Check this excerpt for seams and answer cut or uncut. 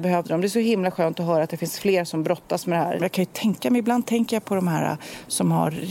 cut